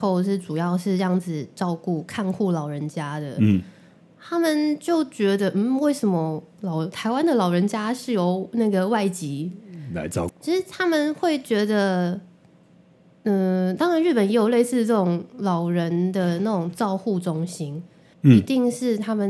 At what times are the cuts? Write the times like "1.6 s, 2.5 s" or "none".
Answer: 10.3 s, 18.1 s